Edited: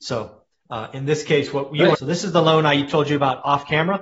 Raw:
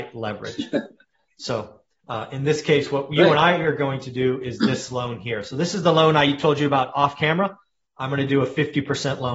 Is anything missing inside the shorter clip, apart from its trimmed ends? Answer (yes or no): yes